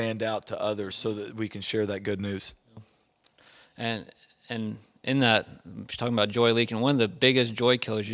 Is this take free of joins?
yes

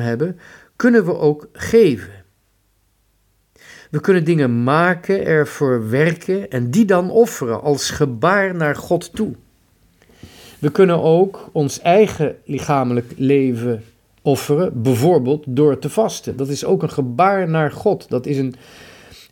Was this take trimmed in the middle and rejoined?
no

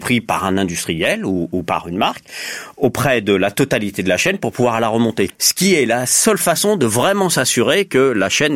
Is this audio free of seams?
no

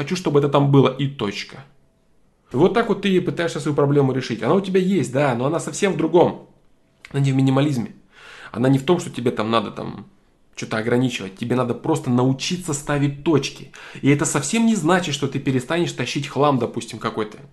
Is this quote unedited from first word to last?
no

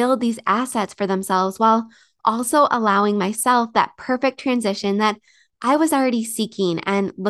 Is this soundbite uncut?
yes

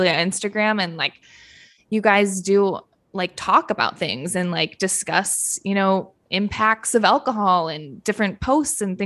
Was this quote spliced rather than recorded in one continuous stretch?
no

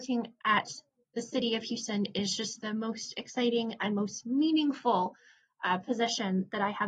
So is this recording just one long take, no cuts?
yes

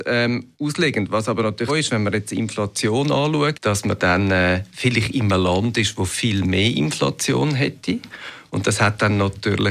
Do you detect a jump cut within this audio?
yes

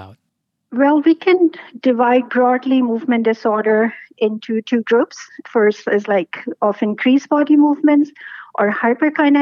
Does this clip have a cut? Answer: no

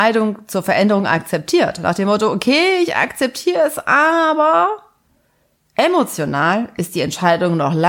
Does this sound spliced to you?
no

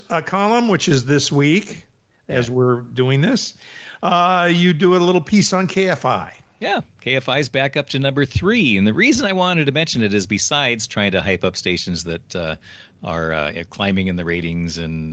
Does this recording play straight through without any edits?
yes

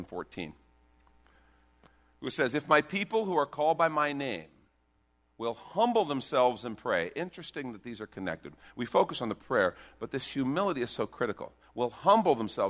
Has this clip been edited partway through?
no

